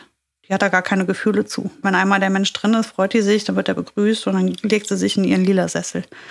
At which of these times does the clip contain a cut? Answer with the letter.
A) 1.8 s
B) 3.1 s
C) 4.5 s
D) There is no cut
A